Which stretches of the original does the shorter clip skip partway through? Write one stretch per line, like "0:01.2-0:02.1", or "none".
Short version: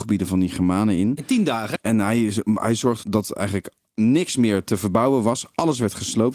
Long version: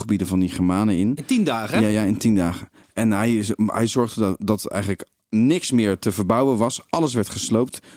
0:01.7-0:02.9
0:04.1-0:04.4